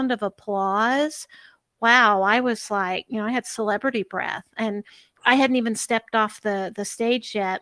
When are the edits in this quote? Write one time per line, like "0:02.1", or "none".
none